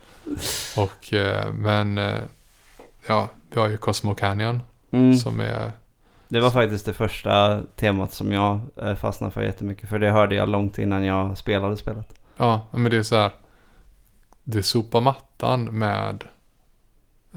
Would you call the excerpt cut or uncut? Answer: cut